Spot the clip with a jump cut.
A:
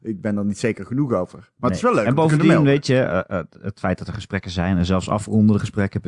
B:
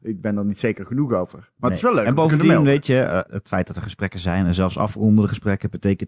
B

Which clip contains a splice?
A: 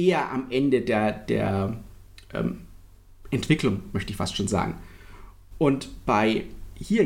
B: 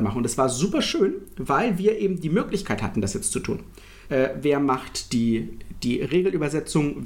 B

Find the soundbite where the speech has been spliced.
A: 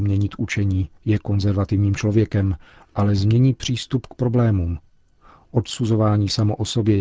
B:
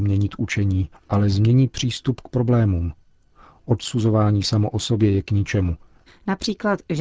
B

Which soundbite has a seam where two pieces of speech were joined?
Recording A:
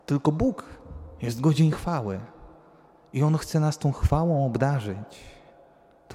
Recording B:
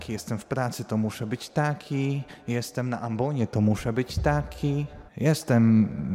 B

